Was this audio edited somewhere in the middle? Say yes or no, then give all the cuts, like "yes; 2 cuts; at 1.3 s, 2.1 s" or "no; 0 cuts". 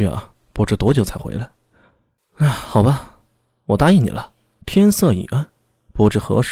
yes; 2 cuts; at 2.2 s, 4.6 s